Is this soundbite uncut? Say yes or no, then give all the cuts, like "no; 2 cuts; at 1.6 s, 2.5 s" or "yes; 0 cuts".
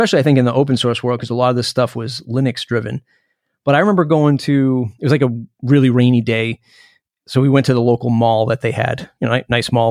yes; 0 cuts